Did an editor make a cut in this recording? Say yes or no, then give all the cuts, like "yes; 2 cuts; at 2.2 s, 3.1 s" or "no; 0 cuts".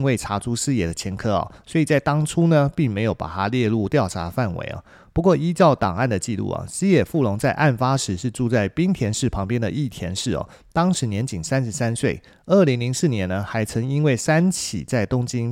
no; 0 cuts